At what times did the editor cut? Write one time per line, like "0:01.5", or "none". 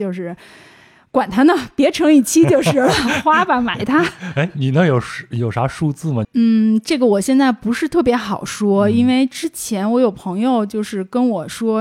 0:06.2